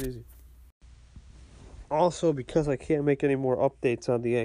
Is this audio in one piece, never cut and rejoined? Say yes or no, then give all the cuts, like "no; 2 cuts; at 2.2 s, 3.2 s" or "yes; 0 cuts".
yes; 0 cuts